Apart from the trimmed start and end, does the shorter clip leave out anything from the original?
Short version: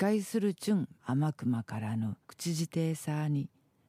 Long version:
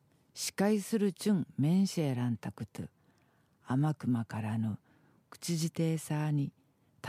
yes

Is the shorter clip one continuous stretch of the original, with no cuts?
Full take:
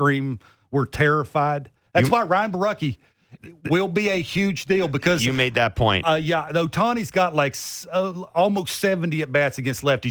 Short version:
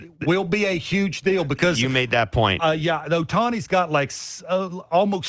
yes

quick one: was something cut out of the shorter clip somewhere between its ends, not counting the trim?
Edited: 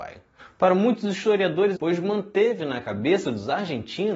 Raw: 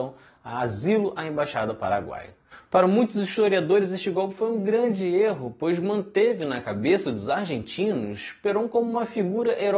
yes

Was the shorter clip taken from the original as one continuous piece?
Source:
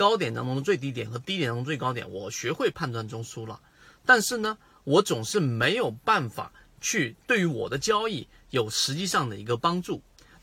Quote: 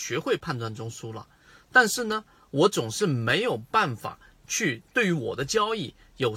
yes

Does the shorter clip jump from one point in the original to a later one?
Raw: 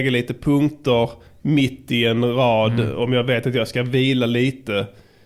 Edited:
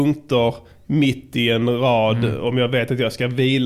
no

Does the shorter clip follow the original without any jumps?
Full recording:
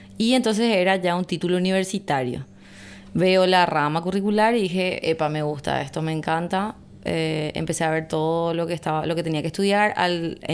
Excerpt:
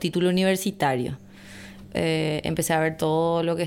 no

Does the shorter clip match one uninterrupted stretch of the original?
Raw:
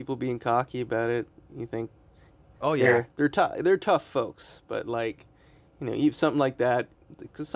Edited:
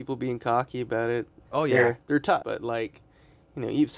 no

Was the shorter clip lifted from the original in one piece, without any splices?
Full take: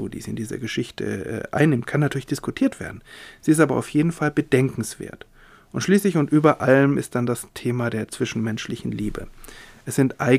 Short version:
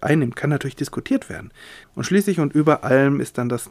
no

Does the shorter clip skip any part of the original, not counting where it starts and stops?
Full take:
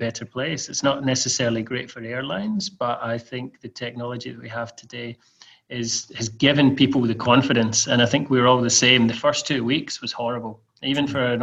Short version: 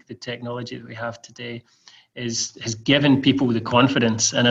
no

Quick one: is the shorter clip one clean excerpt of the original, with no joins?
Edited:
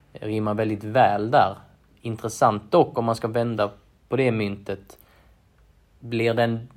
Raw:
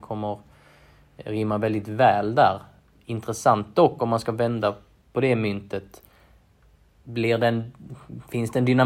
yes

